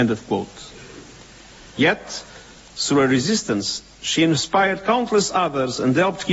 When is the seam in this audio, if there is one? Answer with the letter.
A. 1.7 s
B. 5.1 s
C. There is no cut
A